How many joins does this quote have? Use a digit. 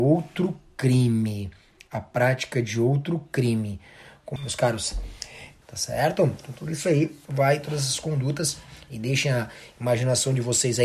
2